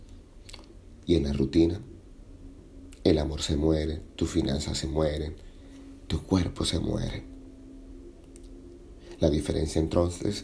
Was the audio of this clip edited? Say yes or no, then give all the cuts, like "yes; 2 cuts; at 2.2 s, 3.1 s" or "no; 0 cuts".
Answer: no; 0 cuts